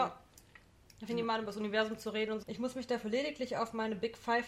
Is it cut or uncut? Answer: cut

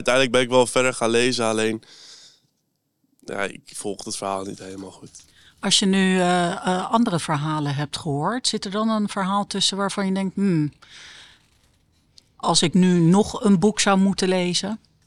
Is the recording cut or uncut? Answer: uncut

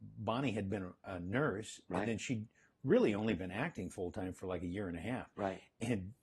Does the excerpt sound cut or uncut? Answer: uncut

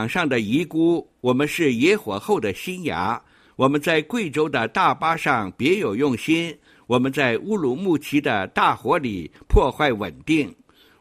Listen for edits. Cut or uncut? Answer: uncut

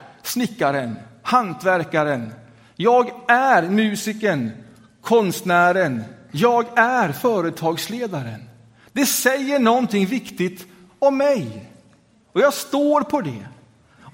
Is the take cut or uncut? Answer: uncut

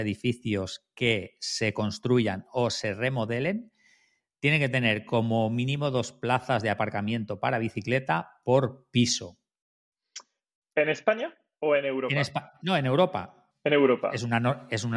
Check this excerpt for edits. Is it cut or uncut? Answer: cut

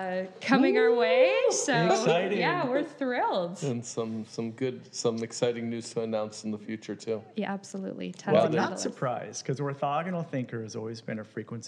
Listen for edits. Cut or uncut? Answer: uncut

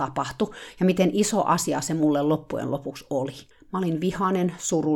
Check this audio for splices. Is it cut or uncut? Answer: cut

